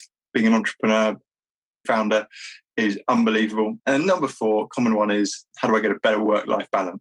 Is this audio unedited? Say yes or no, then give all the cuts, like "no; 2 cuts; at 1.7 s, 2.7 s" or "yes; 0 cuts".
no; 3 cuts; at 1.8 s, 3.8 s, 5.5 s